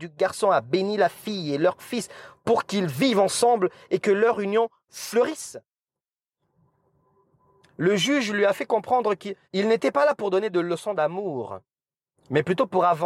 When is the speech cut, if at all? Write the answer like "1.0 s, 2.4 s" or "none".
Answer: 7.6 s, 9.4 s